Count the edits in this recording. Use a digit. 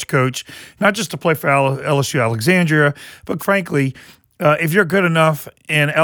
1